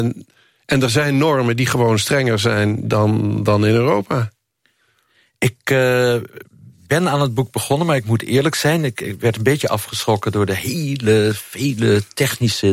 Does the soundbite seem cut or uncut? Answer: uncut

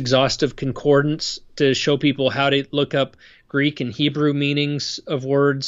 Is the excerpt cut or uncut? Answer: uncut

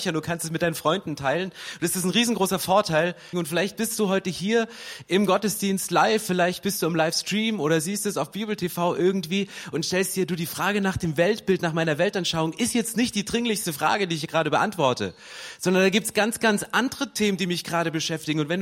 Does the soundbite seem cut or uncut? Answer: cut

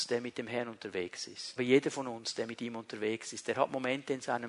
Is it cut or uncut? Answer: cut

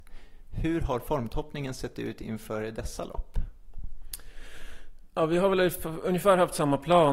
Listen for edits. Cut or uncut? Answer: uncut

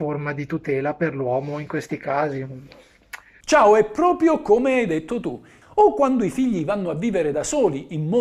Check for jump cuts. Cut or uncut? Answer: cut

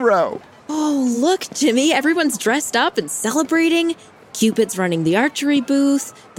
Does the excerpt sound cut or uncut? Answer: uncut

